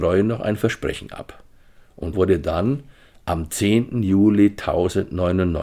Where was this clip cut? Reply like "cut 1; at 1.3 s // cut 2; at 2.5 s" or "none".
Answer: cut 1; at 2.1 s